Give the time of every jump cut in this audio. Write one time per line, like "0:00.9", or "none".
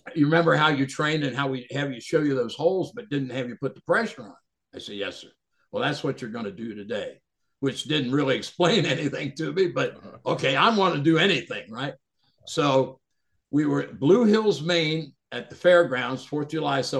none

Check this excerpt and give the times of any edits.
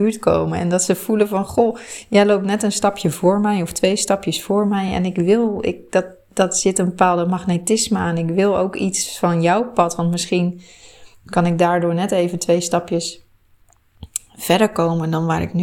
none

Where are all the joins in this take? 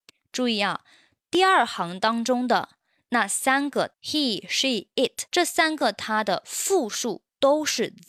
0:03.9
0:05.3

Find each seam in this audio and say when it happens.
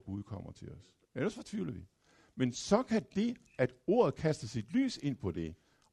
0:01.0

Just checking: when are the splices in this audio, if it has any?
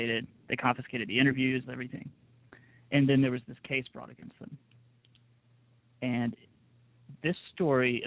0:01.7

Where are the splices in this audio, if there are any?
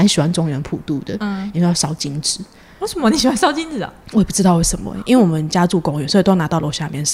0:01.5

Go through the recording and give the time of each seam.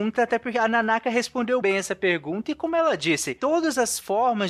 0:01.6

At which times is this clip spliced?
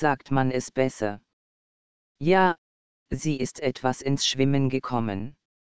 none

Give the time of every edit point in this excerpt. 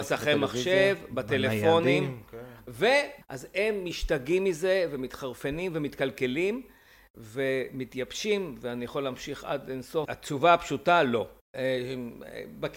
0:03.2
0:10.0

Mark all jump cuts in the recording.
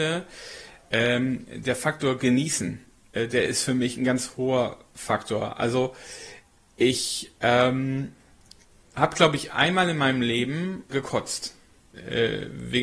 0:10.9

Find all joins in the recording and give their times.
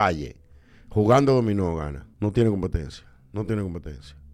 0:02.1

